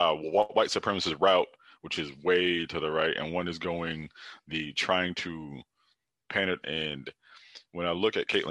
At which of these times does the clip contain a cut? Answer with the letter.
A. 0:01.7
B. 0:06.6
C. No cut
B